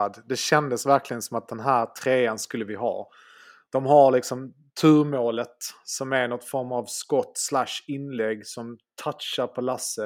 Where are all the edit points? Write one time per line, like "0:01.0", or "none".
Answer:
none